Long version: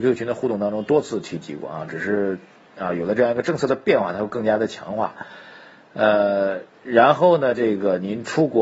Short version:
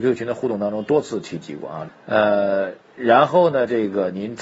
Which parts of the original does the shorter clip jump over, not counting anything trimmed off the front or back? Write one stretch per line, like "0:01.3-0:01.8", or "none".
0:01.9-0:05.8